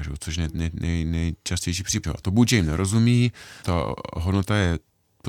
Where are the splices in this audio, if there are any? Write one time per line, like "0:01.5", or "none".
0:02.0
0:03.6